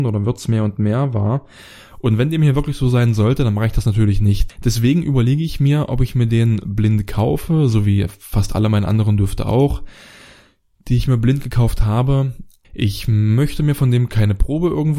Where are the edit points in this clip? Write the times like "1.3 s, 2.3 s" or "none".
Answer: 4.5 s, 12.6 s